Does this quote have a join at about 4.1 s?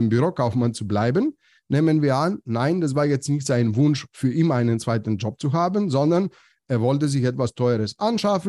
no; 0 cuts

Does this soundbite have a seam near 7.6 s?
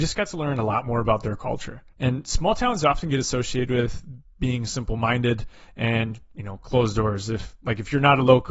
no; 1 cut; at 1.9 s

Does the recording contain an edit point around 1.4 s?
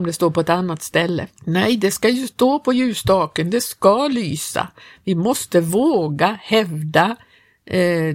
yes; 1 cut; at 1.4 s

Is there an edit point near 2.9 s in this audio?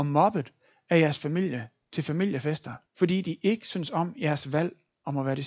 yes; 1 cut; at 2.9 s

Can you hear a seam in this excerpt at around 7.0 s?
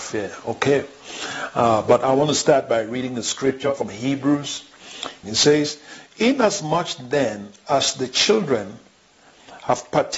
no; 1 cut; at 5.2 s

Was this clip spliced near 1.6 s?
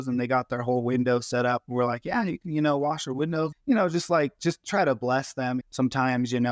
no; 2 cuts; at 3.5 s, 5.6 s

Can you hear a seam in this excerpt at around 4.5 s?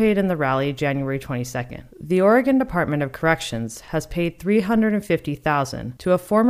no; 1 cut; at 1.9 s

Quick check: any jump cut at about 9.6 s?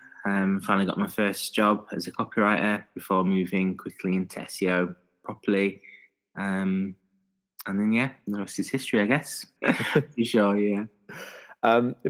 yes; 1 cut; at 9.6 s

